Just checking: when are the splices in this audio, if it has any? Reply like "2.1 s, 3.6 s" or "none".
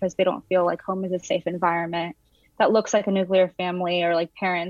2.4 s